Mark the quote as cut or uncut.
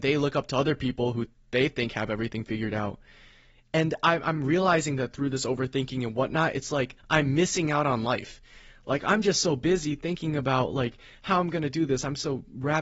uncut